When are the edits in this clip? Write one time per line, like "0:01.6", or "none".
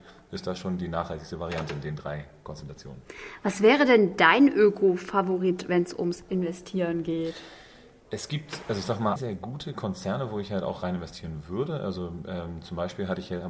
0:09.2